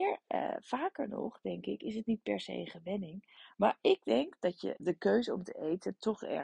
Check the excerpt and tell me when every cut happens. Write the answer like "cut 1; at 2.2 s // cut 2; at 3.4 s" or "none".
cut 1; at 3.5 s // cut 2; at 4.8 s